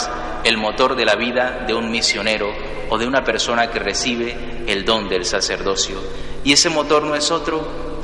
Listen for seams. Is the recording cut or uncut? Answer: uncut